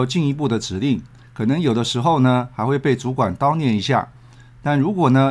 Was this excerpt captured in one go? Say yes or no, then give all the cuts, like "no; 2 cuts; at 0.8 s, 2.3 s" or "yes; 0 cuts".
no; 1 cut; at 1.2 s